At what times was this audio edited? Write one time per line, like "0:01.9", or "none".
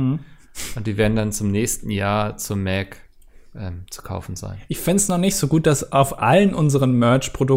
none